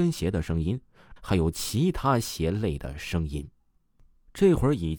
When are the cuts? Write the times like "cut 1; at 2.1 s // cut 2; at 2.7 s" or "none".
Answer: cut 1; at 1.2 s